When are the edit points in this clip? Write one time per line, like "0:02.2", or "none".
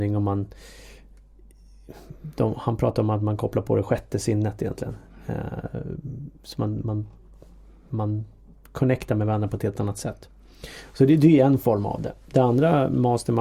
none